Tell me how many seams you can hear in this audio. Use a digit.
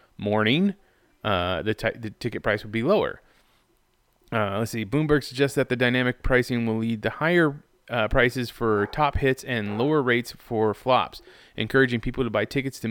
0